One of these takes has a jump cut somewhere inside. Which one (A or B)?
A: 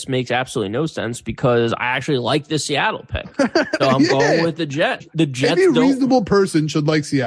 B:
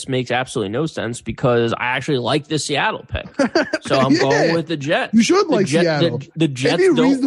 A